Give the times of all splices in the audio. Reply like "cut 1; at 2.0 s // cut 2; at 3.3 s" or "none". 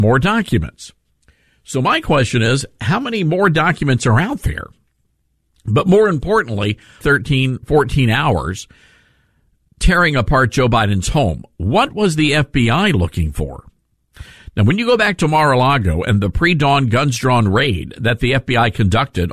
cut 1; at 7.0 s